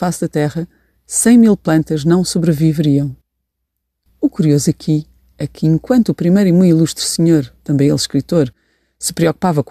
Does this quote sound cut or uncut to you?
uncut